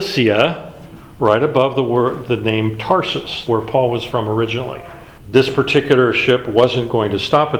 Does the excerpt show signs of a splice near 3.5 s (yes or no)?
yes